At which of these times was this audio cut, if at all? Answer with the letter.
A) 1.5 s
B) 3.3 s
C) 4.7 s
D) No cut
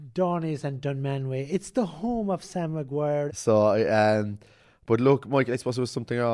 B